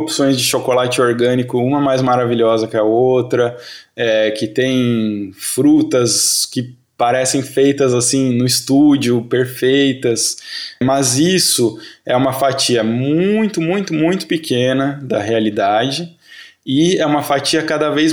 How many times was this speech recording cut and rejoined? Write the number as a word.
zero